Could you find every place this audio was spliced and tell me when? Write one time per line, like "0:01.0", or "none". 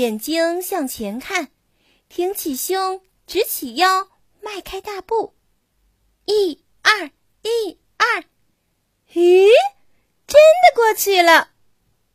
none